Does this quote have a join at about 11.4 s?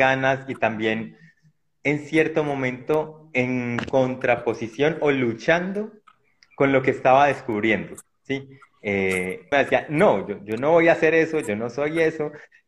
no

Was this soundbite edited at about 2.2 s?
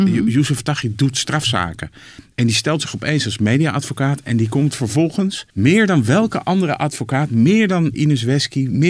no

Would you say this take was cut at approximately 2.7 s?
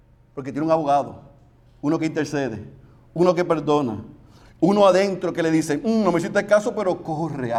no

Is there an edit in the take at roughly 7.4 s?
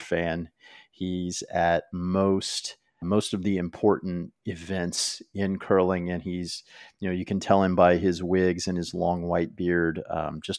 no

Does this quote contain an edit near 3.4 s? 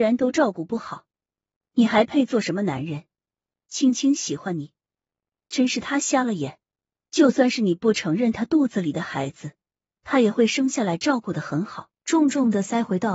no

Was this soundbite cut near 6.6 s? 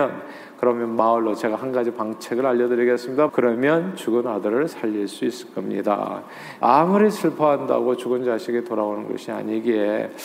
yes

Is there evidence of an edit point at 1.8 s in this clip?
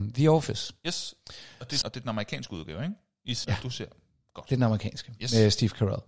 yes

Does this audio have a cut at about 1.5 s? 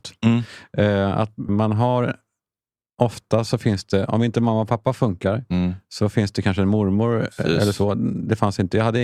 yes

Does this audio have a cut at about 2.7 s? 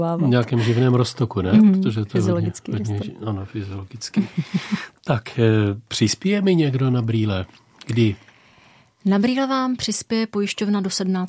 no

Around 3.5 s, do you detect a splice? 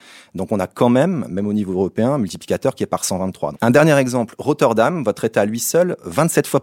yes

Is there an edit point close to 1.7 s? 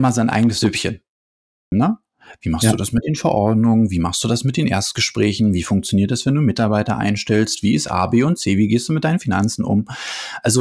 yes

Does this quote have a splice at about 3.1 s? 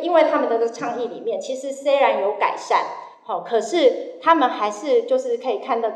no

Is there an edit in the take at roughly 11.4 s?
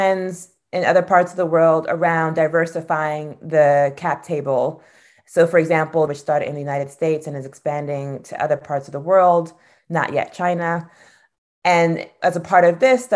no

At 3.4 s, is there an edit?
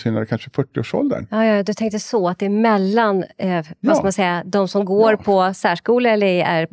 no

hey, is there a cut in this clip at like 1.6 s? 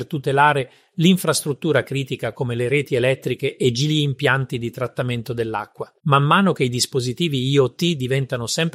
no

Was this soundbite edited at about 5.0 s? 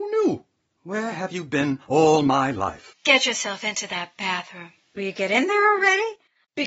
yes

